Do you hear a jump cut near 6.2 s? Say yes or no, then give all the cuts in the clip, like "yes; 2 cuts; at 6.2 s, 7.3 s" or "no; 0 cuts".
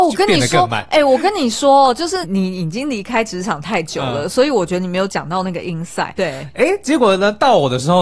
yes; 2 cuts; at 2.2 s, 6.2 s